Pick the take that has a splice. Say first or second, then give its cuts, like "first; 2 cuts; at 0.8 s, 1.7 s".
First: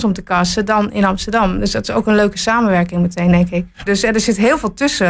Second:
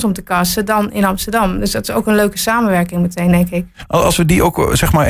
first; 1 cut; at 3.9 s